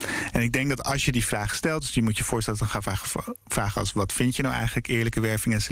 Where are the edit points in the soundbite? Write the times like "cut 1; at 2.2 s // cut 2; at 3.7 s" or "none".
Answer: none